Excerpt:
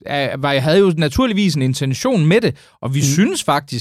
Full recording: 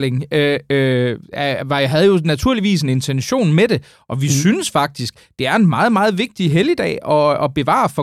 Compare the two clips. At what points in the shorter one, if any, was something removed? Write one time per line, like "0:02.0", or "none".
none